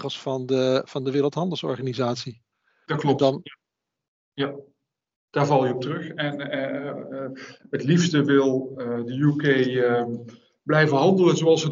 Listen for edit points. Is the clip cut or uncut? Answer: uncut